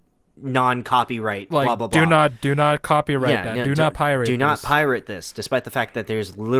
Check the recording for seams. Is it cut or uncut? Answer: uncut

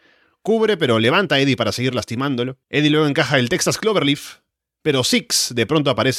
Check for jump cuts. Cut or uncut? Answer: cut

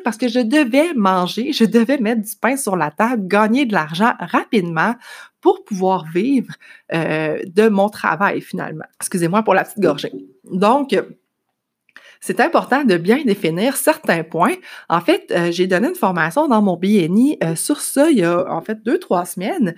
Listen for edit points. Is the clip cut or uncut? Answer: cut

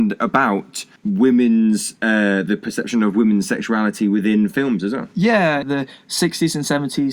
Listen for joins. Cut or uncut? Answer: cut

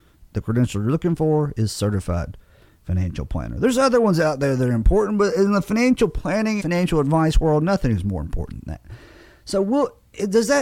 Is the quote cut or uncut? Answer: cut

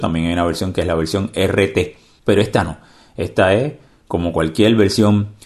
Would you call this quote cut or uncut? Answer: cut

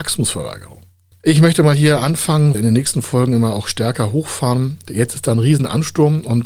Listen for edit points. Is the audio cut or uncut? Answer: cut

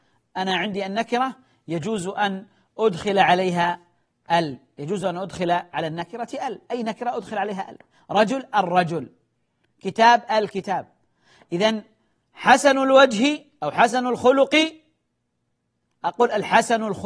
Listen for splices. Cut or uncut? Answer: uncut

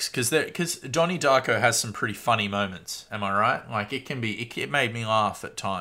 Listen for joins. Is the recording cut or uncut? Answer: uncut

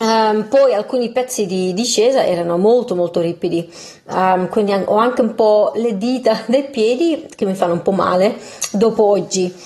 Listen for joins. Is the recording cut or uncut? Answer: uncut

